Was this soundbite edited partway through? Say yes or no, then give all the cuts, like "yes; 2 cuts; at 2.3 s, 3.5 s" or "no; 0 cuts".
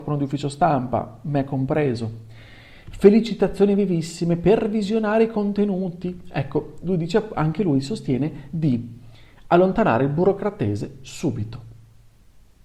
no; 0 cuts